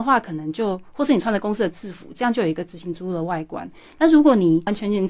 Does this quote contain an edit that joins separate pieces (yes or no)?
no